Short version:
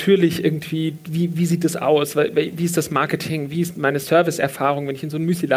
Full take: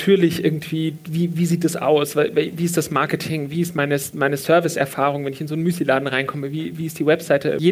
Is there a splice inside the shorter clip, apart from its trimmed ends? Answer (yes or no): yes